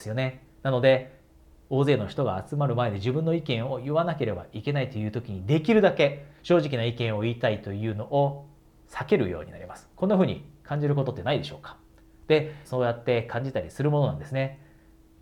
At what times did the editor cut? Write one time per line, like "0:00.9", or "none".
0:09.9
0:12.6